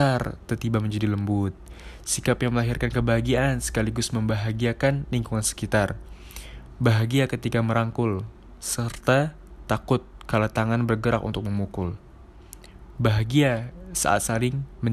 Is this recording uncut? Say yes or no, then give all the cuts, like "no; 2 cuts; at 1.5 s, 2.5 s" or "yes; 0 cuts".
no; 2 cuts; at 6.7 s, 12.9 s